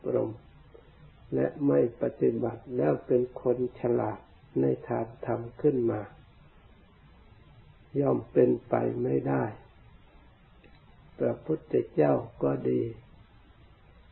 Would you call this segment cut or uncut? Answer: uncut